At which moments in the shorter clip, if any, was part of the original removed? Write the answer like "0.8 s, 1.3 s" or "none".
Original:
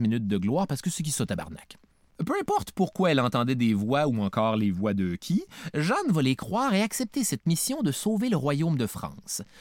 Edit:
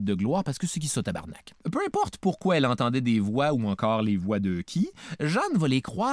1.6 s